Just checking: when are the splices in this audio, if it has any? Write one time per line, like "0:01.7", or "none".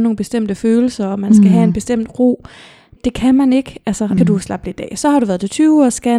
0:03.0
0:04.2